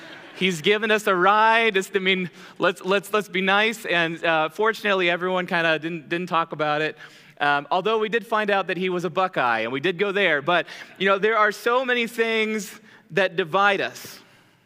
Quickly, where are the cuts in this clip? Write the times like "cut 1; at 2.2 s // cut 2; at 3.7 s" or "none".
none